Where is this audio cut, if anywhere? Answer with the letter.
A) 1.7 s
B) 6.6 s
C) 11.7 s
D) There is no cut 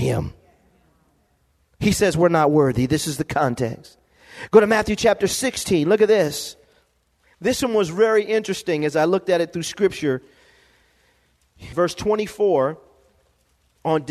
C